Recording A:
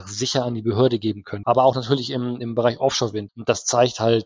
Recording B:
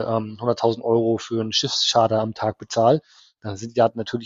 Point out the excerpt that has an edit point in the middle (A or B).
A